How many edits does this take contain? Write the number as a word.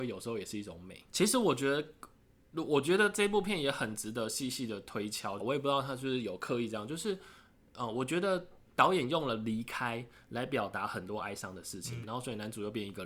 three